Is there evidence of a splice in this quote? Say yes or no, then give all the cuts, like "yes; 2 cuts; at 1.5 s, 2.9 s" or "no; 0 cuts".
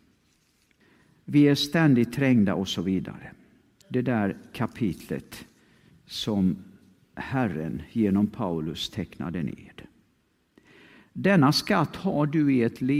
yes; 2 cuts; at 1.2 s, 3.8 s